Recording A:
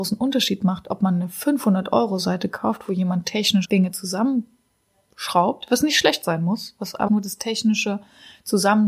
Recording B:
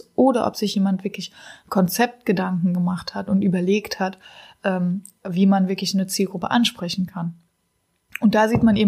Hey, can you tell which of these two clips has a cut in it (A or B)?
A